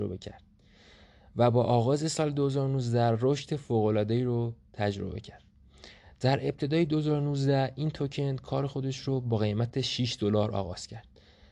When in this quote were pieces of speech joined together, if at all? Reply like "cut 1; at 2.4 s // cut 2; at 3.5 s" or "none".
none